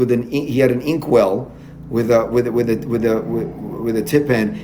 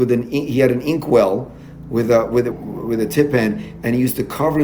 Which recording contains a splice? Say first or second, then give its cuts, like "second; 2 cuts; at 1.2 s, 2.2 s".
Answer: second; 1 cut; at 2.5 s